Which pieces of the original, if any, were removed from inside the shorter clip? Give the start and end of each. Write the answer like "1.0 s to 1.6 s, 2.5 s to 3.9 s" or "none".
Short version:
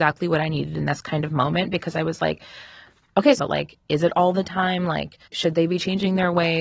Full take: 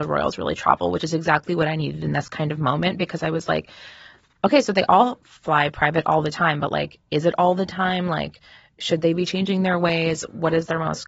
4.6 s to 6.6 s, 8.5 s to 8.7 s